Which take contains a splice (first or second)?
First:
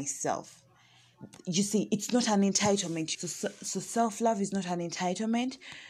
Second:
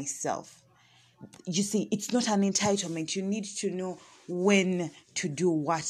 first